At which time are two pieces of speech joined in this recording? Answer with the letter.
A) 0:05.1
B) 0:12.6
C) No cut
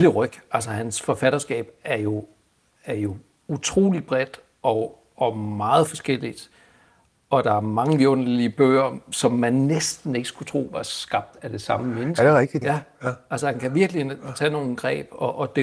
B